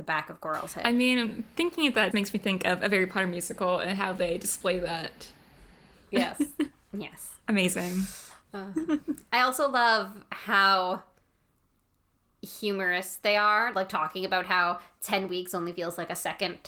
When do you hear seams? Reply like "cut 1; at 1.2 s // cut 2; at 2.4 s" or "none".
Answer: cut 1; at 2.1 s

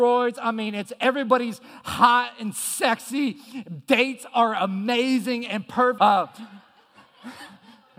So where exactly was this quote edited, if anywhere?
cut 1; at 6.0 s

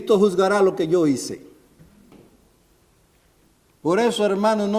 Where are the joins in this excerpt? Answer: none

